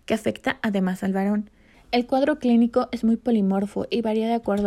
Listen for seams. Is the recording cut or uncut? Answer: cut